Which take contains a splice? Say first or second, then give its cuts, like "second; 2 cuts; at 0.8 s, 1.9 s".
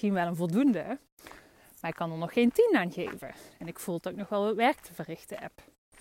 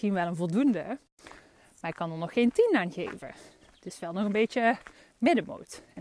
first; 1 cut; at 3.5 s